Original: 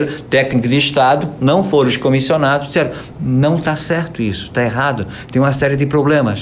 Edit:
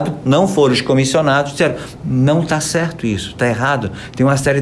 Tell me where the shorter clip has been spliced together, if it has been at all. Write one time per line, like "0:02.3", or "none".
none